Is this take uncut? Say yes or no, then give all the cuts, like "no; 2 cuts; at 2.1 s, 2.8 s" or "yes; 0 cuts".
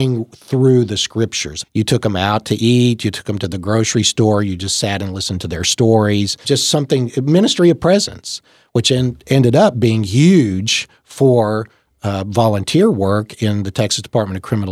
no; 2 cuts; at 1.6 s, 6.4 s